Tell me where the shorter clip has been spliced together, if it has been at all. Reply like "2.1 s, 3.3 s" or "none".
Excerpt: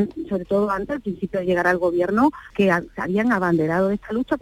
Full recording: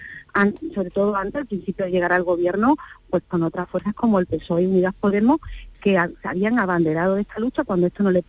2.5 s

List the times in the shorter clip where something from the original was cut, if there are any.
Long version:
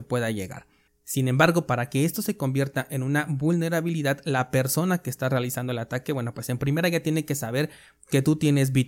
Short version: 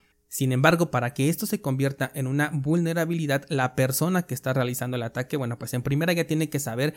none

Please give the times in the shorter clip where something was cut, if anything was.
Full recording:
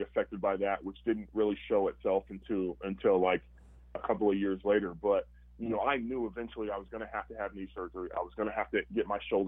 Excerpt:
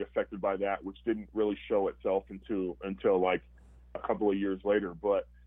none

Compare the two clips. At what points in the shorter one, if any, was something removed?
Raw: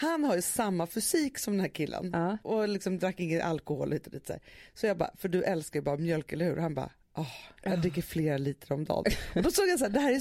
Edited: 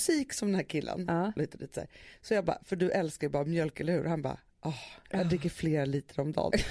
1.4 s

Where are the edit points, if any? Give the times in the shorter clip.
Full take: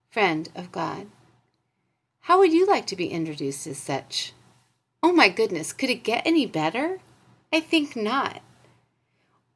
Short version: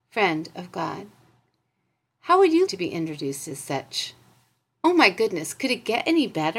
2.7 s

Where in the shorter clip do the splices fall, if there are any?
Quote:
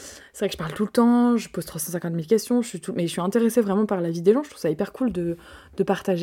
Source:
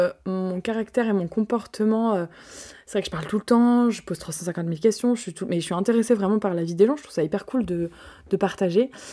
none

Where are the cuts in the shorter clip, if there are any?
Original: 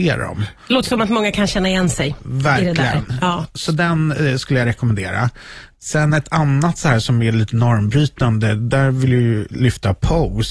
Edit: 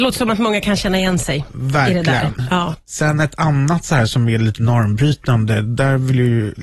2.8 s

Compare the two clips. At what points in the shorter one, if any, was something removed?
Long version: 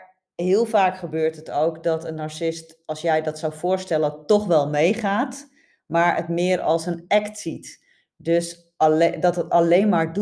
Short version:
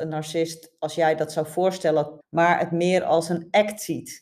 2.2 s

